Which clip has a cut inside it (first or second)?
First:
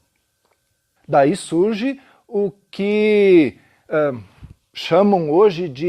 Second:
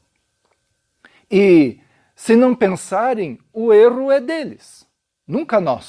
first